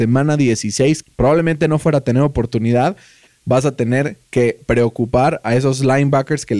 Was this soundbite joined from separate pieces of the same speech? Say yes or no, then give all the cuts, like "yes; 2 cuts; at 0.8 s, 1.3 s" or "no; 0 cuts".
yes; 2 cuts; at 1.0 s, 3.3 s